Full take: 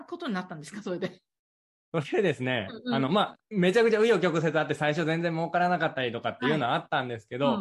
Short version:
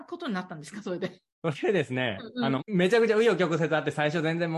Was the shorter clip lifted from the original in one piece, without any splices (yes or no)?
no